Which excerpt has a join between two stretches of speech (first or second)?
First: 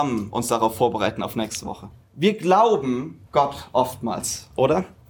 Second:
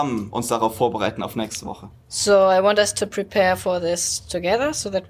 first